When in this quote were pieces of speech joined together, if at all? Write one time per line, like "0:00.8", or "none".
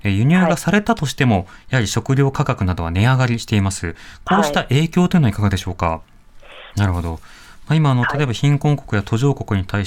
0:06.7